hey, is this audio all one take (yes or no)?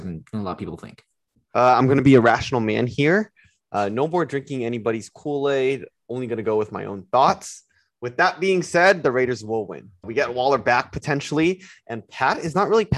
no